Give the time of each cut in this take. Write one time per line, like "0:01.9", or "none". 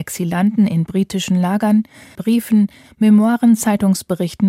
0:02.1